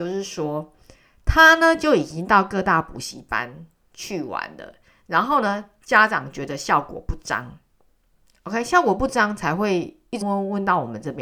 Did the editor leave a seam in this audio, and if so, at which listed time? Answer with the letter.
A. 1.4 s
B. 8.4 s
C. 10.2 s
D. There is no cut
C